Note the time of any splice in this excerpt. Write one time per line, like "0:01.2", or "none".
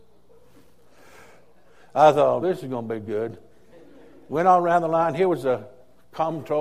0:02.4